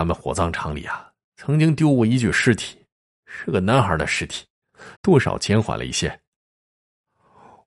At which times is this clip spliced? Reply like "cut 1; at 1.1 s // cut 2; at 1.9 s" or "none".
cut 1; at 4.9 s